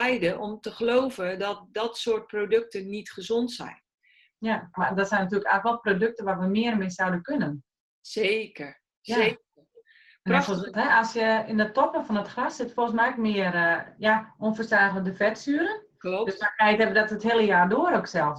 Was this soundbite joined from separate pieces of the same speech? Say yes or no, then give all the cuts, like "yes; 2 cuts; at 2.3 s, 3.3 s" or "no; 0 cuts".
yes; 2 cuts; at 4.7 s, 10.7 s